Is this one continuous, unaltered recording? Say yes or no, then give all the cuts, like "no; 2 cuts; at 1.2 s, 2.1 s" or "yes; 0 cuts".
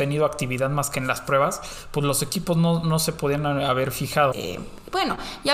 no; 1 cut; at 4.3 s